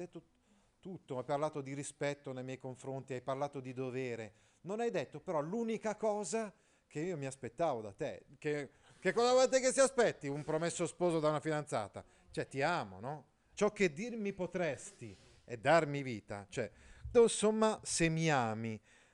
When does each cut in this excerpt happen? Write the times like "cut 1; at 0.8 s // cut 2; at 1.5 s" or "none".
cut 1; at 13.5 s // cut 2; at 17.1 s